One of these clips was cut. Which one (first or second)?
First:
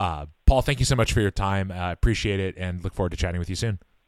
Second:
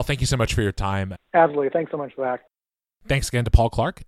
second